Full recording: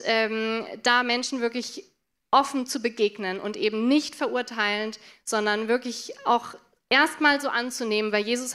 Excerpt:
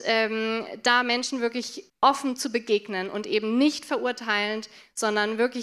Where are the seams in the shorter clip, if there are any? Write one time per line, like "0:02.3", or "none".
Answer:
0:01.9